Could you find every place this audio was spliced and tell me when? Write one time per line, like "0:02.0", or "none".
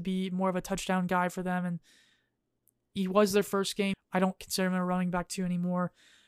0:03.9